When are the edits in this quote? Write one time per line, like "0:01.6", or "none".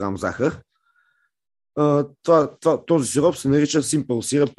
none